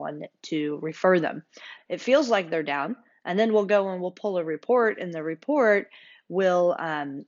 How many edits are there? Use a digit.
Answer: 1